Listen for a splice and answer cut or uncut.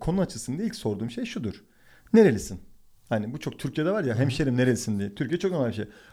uncut